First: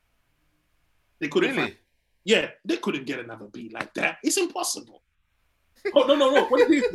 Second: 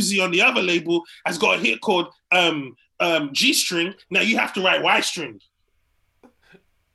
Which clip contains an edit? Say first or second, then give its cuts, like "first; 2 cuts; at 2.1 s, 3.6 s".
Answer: first; 1 cut; at 5.8 s